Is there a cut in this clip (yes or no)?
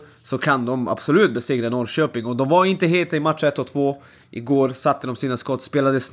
no